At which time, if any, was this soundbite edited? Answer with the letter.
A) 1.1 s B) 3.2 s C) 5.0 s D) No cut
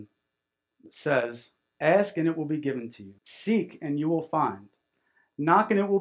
B